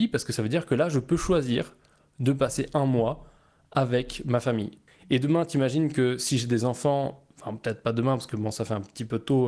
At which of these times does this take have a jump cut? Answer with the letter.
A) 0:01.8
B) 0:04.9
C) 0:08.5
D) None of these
B